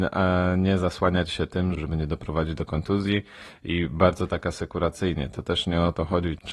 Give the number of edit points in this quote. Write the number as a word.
one